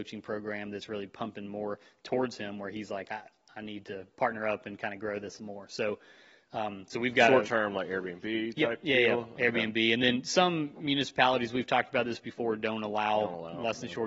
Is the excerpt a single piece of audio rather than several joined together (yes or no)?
yes